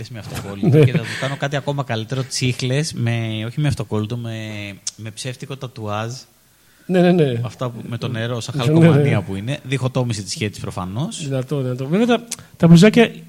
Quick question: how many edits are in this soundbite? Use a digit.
0